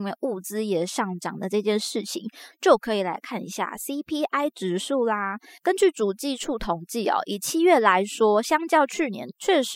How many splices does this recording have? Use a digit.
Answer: 0